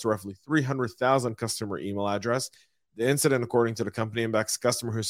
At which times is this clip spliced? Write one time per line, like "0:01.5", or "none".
none